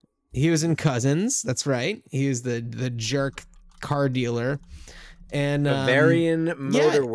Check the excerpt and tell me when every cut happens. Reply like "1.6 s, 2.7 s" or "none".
none